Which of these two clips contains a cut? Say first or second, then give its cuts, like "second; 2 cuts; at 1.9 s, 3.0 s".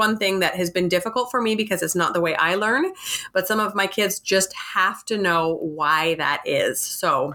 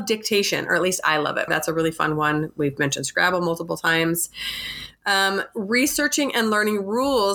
second; 1 cut; at 1.5 s